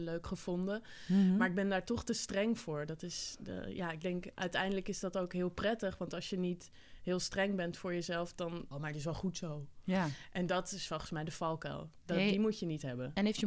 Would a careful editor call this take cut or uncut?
cut